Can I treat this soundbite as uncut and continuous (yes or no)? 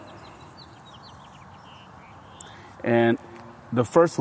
yes